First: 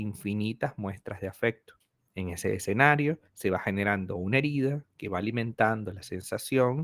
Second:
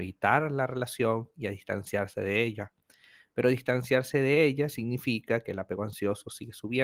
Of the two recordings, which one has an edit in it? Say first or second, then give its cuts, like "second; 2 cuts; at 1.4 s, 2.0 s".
first; 2 cuts; at 2.1 s, 3.3 s